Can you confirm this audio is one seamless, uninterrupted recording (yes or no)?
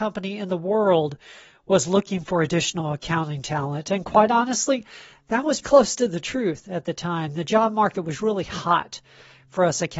no